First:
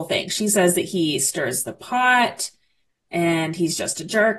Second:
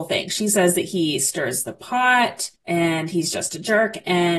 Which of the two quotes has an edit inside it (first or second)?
second